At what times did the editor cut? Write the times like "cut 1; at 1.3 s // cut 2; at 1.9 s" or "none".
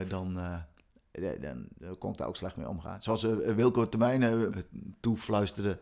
cut 1; at 4.5 s

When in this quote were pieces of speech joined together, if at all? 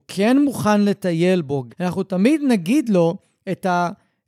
cut 1; at 1.7 s

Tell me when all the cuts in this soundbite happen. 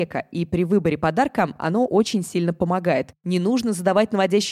none

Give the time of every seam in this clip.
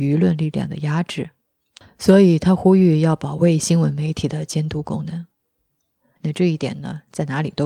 cut 1; at 6.2 s

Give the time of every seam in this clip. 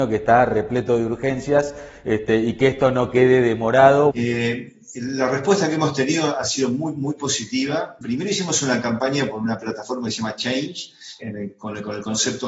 cut 1; at 4.1 s // cut 2; at 8.0 s // cut 3; at 11.2 s

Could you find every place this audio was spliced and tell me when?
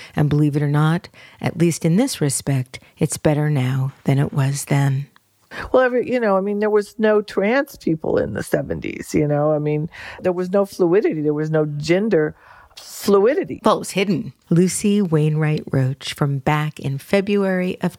cut 1; at 10.2 s // cut 2; at 14.4 s

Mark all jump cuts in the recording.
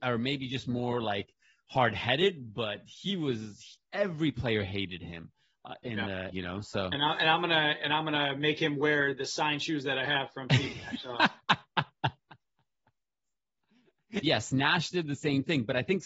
cut 1; at 6.3 s // cut 2; at 14.2 s

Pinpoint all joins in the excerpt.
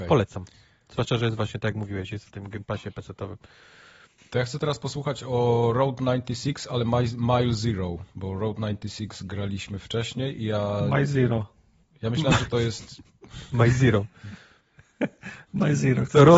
none

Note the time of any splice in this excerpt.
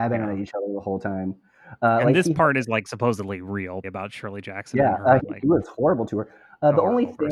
cut 1; at 3.8 s // cut 2; at 5.2 s

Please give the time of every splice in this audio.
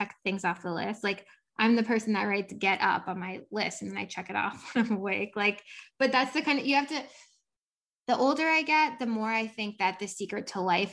none

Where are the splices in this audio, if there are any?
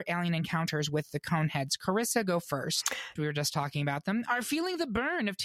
cut 1; at 3.2 s

